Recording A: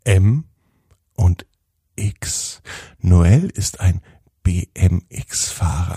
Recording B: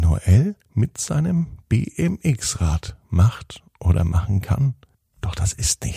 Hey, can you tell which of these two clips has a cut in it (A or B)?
B